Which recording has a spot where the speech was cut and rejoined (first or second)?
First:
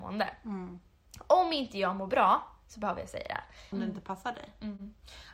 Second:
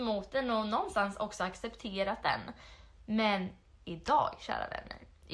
first